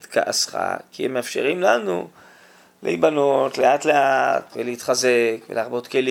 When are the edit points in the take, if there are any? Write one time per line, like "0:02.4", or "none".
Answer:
0:04.5